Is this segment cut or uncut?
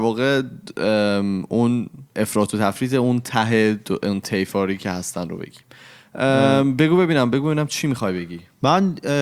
cut